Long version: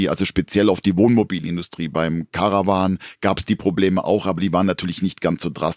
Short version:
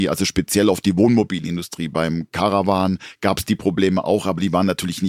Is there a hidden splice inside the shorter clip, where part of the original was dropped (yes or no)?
no